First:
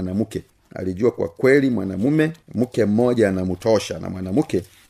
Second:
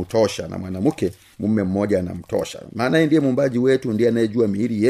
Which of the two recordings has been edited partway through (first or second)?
first